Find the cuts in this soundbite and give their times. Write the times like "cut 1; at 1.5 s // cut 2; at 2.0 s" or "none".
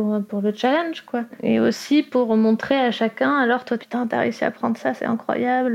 cut 1; at 3.8 s